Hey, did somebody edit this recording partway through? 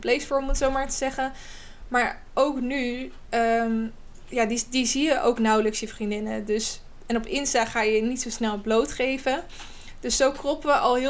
no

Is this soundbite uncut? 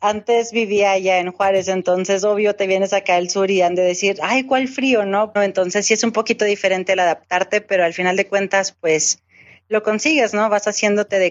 no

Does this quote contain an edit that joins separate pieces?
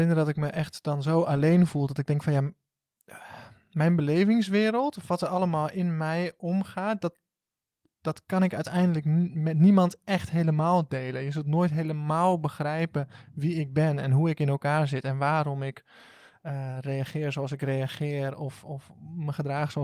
no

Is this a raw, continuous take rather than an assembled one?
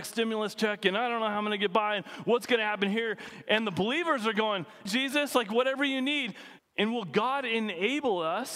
no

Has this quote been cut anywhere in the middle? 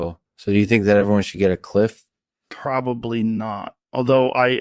no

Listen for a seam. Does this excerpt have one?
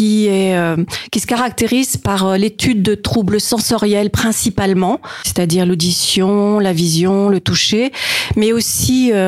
no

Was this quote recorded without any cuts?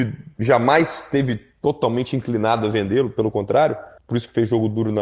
no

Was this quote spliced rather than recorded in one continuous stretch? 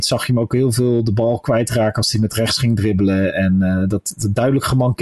no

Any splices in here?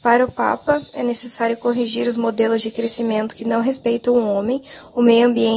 no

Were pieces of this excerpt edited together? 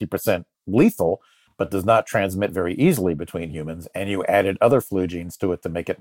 no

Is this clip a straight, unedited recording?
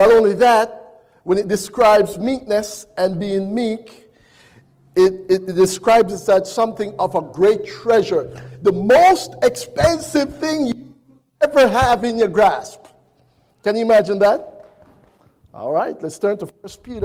yes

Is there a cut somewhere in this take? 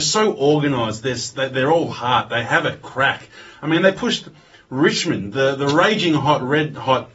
no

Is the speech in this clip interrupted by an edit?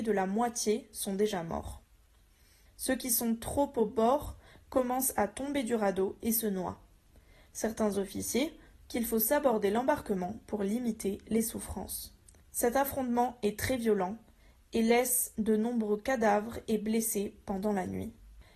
yes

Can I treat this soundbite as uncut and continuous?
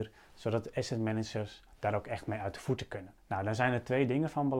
no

